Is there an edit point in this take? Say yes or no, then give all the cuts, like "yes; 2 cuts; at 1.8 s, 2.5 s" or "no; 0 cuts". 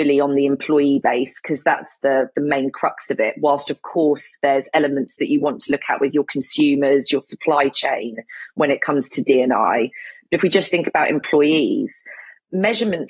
no; 0 cuts